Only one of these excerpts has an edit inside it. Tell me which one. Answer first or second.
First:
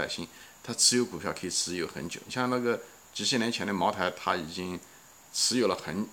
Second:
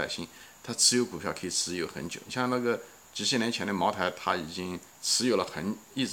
second